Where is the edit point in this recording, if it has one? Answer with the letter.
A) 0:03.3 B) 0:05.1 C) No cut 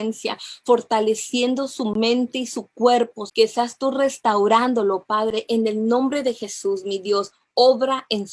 A